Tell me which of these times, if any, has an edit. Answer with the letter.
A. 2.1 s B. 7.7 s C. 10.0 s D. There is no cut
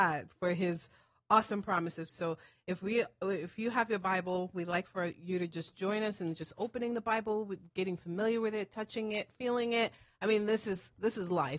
A